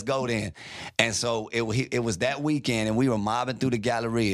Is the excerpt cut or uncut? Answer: uncut